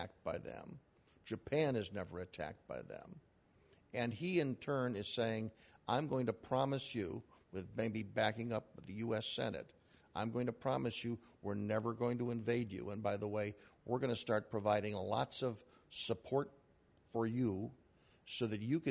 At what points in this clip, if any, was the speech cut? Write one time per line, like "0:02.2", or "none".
none